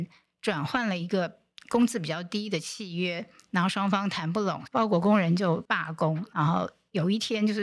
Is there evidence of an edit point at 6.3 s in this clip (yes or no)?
yes